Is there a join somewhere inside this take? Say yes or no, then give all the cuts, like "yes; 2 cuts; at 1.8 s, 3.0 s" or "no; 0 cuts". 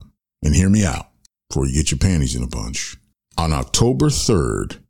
no; 0 cuts